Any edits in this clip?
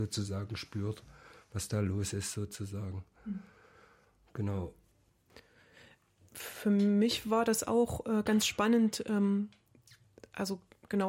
no; 0 cuts

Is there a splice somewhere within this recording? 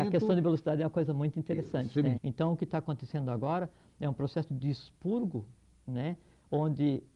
yes; 1 cut; at 2.2 s

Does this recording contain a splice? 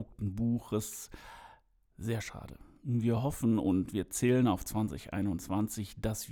no; 0 cuts

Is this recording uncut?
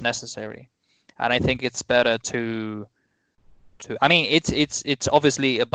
yes; 0 cuts

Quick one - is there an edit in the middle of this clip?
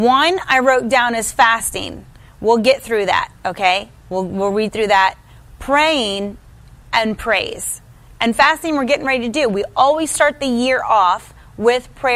no; 0 cuts

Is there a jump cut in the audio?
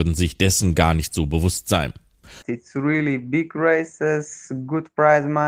yes; 1 cut; at 2.4 s

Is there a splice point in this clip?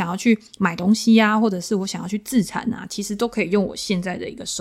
no; 0 cuts

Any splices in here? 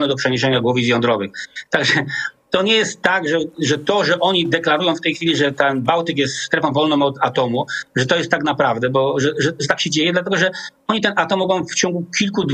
no; 0 cuts

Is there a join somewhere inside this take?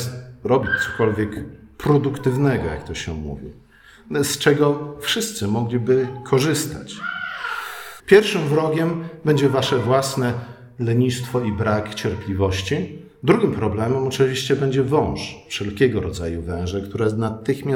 yes; 1 cut; at 8.0 s

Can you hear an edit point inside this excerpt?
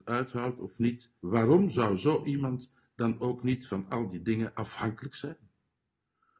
yes; 1 cut; at 1.2 s

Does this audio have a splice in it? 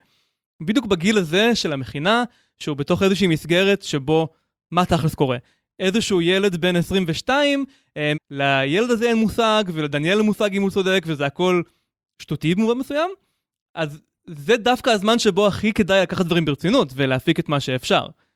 yes; 1 cut; at 8.1 s

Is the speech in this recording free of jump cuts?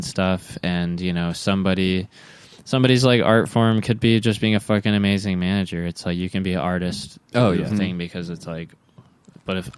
no; 1 cut; at 7.7 s

